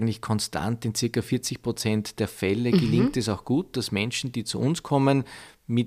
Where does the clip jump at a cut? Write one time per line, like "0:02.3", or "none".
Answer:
none